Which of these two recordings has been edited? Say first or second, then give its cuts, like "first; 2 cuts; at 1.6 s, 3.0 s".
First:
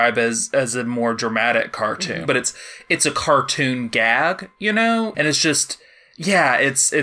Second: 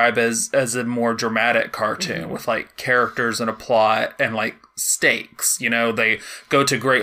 first; 2 cuts; at 2.3 s, 5.1 s